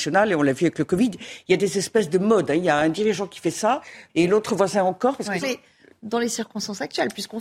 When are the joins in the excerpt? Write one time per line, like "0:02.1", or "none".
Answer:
0:04.1
0:05.4